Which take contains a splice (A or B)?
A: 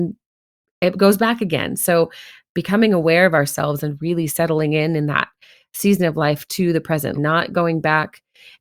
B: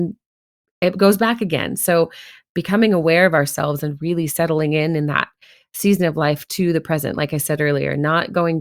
A